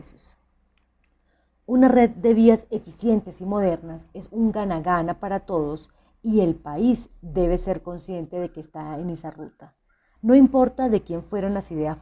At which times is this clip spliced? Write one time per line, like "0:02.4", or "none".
0:10.2